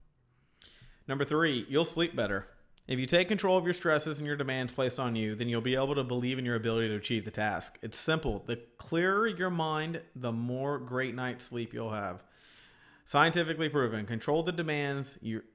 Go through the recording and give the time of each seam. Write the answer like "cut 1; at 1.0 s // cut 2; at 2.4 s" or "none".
none